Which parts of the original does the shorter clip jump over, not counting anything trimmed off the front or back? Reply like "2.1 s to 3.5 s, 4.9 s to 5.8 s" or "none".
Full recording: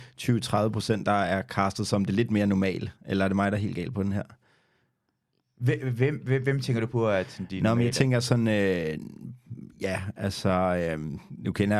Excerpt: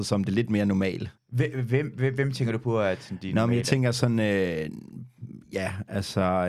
3.0 s to 5.5 s